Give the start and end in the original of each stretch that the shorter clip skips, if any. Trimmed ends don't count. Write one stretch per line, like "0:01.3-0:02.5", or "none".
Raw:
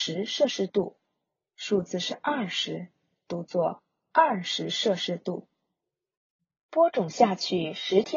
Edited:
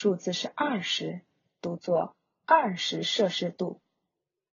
none